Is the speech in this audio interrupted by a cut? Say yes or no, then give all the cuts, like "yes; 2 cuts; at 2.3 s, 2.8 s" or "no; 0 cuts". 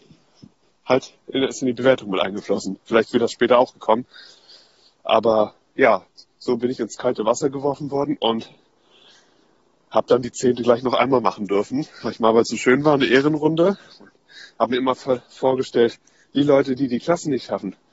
no; 0 cuts